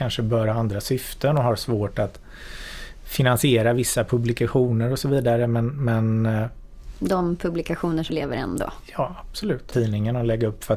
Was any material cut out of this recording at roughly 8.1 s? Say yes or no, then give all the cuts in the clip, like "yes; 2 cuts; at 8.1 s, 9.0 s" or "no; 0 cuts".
yes; 2 cuts; at 8.1 s, 9.7 s